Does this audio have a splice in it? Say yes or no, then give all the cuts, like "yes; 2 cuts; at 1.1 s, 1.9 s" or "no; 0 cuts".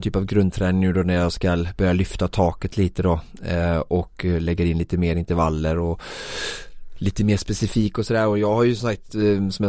no; 0 cuts